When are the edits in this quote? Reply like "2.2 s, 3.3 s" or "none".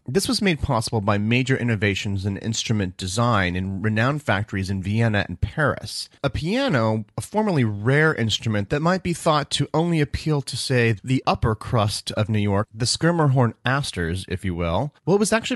11.2 s